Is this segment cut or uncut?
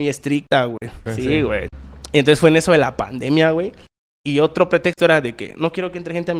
cut